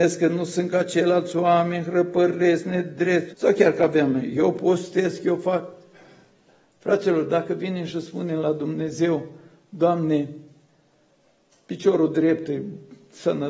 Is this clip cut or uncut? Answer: cut